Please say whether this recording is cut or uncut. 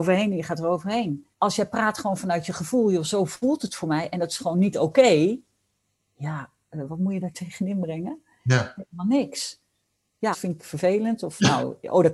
cut